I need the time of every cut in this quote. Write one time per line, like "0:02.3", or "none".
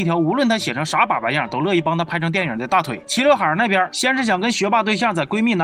none